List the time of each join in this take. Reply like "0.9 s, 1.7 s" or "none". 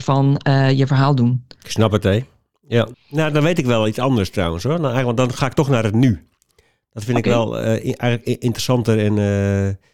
2.9 s